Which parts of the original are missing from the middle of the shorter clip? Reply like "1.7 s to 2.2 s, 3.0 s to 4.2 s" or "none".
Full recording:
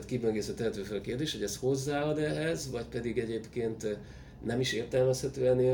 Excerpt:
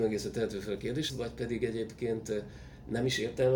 1.3 s to 2.6 s